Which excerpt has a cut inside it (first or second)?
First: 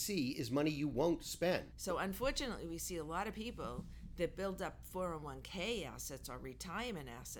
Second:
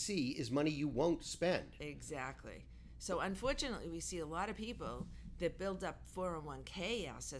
first